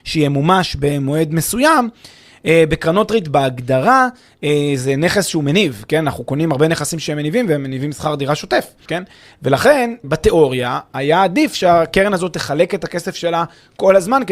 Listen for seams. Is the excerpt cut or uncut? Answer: cut